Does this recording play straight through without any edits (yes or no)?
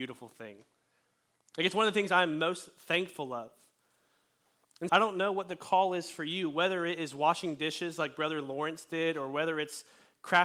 no